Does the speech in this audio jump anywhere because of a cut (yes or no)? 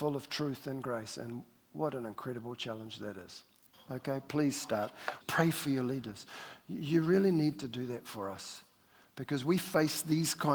yes